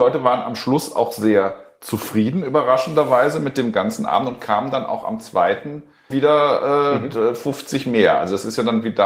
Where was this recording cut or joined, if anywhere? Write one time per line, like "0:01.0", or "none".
0:06.1